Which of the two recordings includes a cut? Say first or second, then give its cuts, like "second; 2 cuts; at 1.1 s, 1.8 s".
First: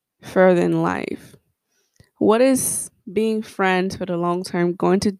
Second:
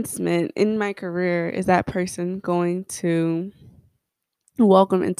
first; 1 cut; at 3.0 s